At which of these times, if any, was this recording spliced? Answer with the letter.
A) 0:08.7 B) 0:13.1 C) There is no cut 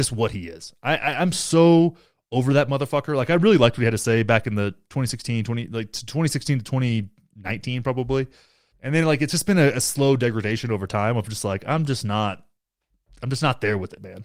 A